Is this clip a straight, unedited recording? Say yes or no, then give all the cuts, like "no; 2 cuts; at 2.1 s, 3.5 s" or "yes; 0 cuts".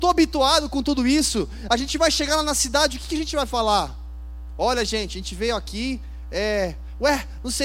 yes; 0 cuts